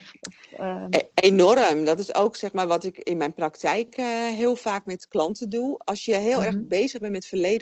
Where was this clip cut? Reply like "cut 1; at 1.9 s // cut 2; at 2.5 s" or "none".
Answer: none